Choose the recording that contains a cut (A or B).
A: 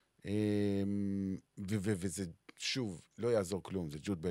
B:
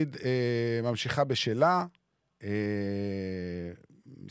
A